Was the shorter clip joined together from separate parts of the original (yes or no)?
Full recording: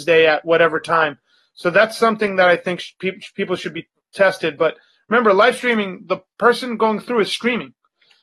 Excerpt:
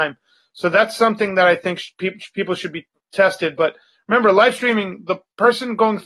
no